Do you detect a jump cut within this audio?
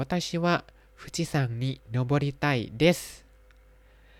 no; 0 cuts

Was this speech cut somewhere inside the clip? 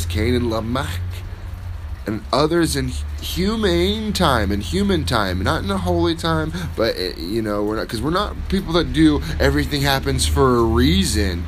no; 0 cuts

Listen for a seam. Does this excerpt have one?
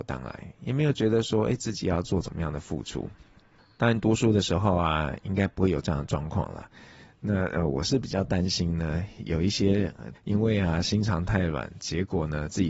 yes; 1 cut; at 10.1 s

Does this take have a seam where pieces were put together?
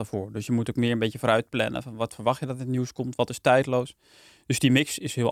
no; 0 cuts

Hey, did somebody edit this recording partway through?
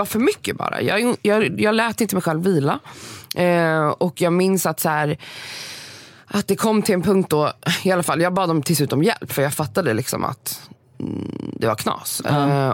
no; 0 cuts

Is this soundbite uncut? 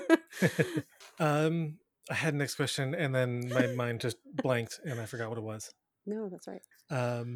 yes; 0 cuts

